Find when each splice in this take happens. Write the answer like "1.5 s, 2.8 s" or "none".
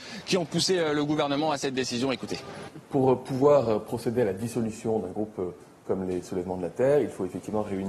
none